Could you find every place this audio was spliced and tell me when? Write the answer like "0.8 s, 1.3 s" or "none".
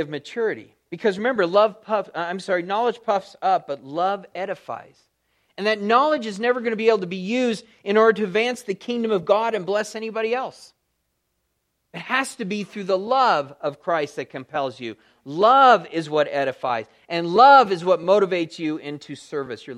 none